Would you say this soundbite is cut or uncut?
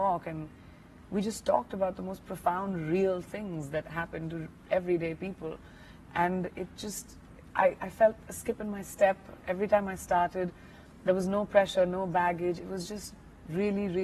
uncut